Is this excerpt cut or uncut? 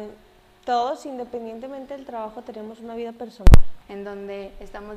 cut